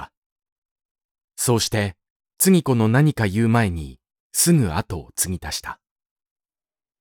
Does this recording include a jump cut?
no; 0 cuts

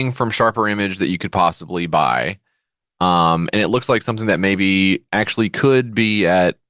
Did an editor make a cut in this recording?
no; 0 cuts

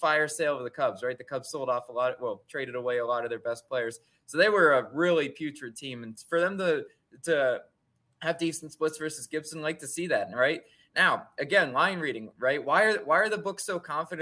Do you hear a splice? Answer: no; 0 cuts

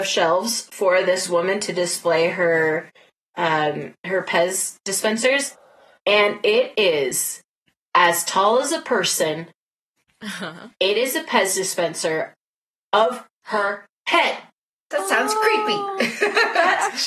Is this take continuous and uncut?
yes; 0 cuts

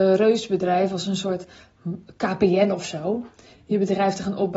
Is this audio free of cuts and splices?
yes; 0 cuts

